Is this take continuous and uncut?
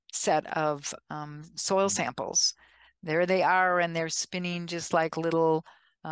yes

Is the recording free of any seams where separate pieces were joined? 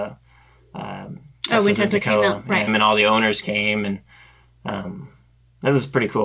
no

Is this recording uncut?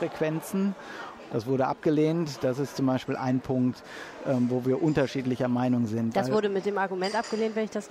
no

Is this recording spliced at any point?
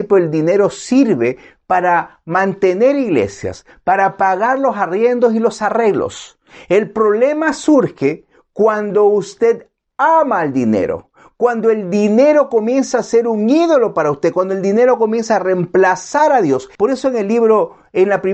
yes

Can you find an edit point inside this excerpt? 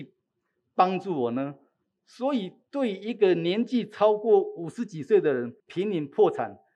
yes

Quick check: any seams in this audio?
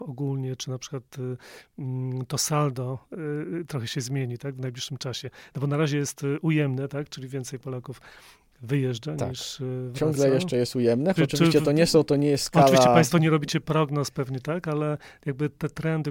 yes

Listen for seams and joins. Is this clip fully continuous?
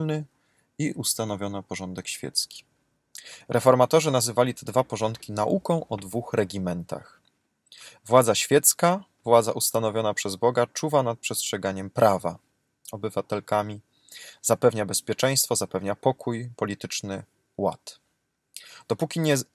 no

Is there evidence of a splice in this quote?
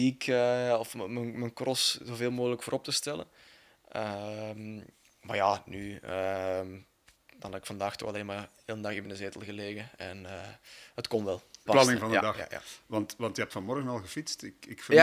yes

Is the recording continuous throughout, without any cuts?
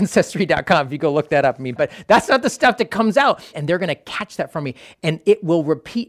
no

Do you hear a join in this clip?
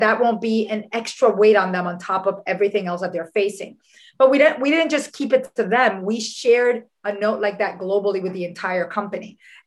no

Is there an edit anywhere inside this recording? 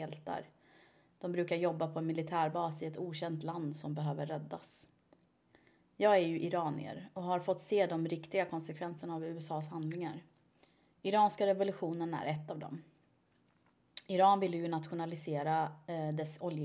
no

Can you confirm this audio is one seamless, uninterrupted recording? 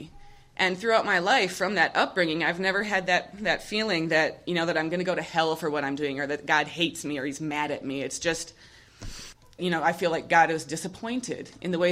no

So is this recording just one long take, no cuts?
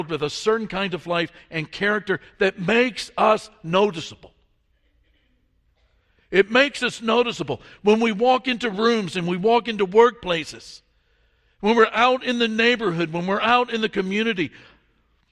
yes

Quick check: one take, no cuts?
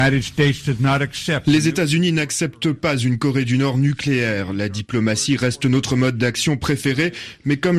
yes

